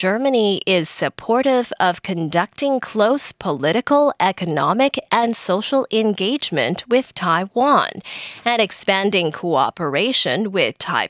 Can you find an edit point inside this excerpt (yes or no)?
no